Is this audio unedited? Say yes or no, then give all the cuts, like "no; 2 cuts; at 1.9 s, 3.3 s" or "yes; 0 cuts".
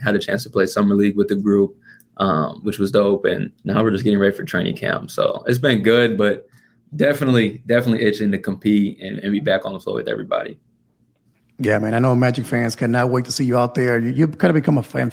no; 1 cut; at 3.6 s